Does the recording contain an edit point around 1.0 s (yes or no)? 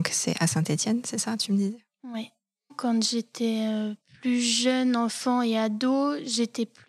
no